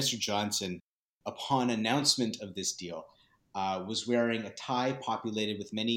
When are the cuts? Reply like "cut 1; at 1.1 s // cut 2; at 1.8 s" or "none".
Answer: none